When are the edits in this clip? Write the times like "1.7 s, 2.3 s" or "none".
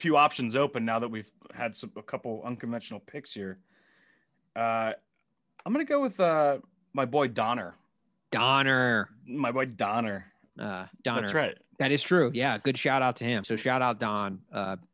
10.5 s, 11.7 s, 13.4 s

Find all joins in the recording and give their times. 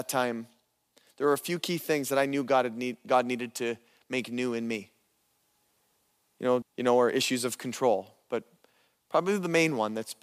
6.6 s

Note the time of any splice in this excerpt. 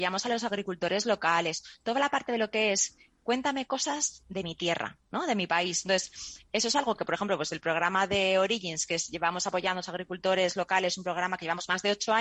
none

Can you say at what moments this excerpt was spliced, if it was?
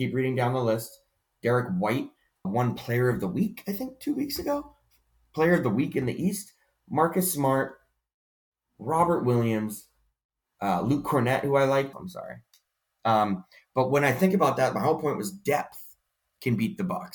2.4 s, 11.9 s

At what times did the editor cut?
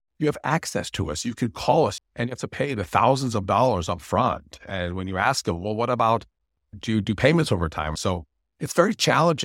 2.0 s, 8.0 s

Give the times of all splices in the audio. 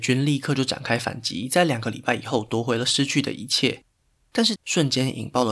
4.6 s

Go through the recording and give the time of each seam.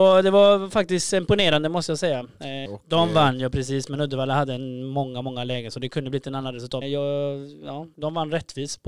2.7 s, 6.8 s, 7.9 s

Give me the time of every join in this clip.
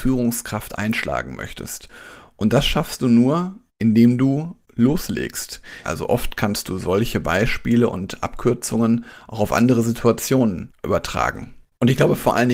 5.8 s

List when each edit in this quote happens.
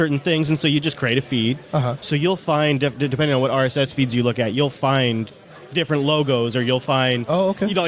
2.0 s

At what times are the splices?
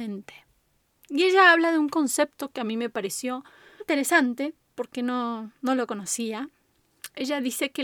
3.8 s

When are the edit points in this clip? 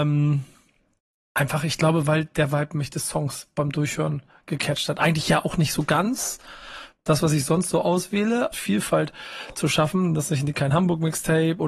8.5 s

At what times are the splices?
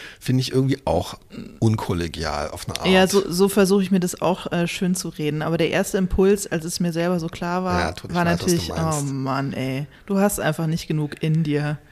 8.1 s

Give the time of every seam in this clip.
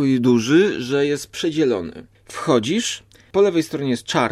2.1 s

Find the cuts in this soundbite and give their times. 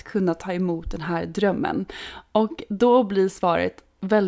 none

